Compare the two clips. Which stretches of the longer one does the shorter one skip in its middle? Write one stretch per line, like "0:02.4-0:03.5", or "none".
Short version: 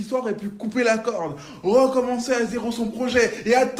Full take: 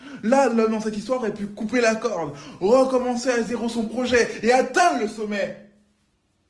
none

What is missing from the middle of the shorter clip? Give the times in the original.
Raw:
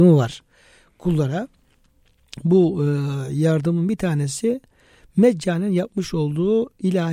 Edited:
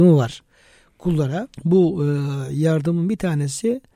0:01.5-0:02.3

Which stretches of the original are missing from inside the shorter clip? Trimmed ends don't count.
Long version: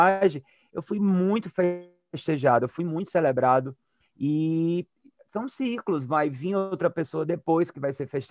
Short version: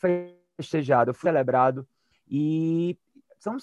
0:02.8-0:03.1

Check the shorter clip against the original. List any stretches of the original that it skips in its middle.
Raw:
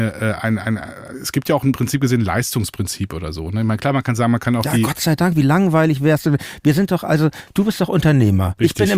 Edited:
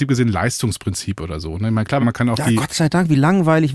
0:03.9-0:04.3

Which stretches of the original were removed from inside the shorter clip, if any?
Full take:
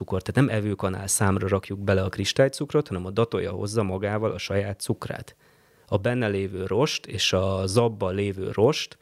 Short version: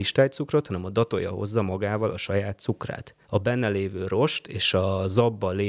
0:05.4-0:05.8

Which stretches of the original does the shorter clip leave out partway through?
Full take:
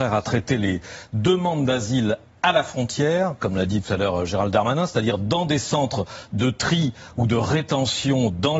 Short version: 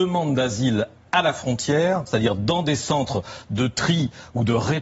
0:03.4-0:04.9

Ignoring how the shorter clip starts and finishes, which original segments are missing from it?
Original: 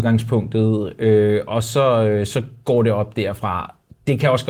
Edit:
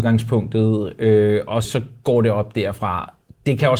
0:01.6-0:02.3

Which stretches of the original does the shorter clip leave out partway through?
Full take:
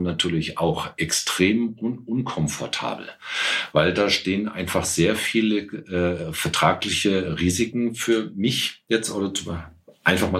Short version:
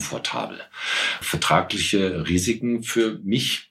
0:03.7-0:06.3

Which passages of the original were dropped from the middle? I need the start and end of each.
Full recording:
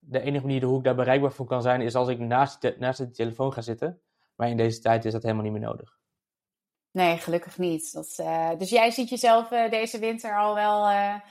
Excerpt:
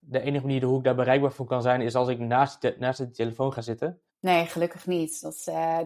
0:04.1-0:06.8

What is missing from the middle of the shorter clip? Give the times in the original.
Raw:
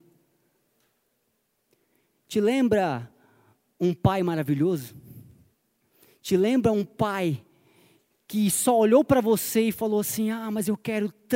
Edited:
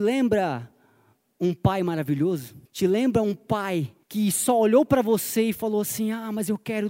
0:05.1-0:06.1
0:07.5-0:08.2

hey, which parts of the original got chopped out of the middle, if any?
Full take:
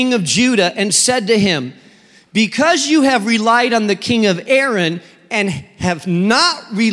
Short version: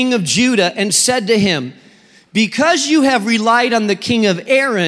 none

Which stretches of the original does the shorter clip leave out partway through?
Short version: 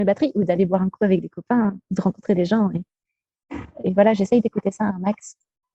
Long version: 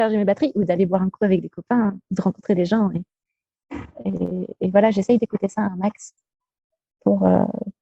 0:04.0-0:04.6

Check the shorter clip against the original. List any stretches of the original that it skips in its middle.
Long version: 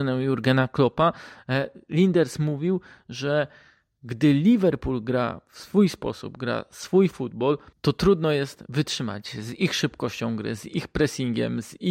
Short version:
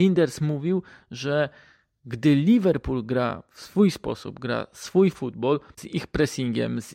0:07.8-0:10.6

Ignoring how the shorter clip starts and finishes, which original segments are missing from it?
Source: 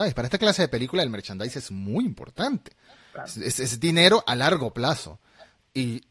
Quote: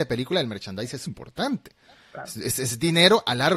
0:01.7-0:02.1

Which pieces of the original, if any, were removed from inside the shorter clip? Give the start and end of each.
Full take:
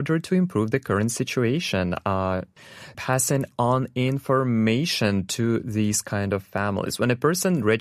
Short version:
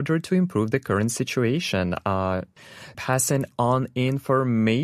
none

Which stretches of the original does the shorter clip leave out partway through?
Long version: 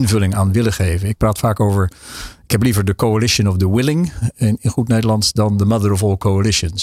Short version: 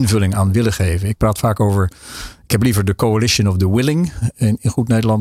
none

